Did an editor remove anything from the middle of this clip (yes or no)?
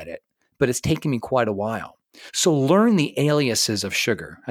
no